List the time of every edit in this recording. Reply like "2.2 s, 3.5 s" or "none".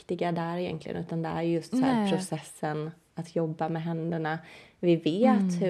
none